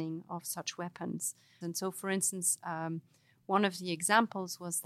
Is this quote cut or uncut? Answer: cut